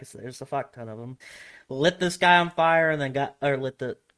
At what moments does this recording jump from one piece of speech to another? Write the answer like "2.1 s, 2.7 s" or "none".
1.2 s